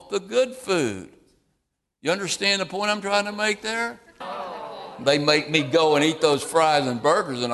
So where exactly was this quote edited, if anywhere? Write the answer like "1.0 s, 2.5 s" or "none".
4.2 s